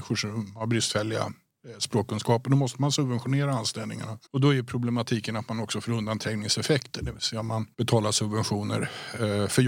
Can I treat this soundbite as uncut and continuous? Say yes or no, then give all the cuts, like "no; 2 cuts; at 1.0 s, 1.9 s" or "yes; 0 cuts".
no; 2 cuts; at 4.3 s, 7.7 s